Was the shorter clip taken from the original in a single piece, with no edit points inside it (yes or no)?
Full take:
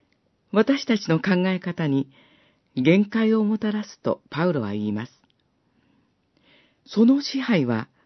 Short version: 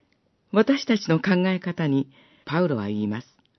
no